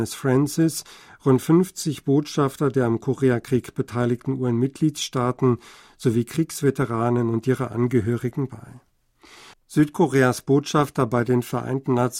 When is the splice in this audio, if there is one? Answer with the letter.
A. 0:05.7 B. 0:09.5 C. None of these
B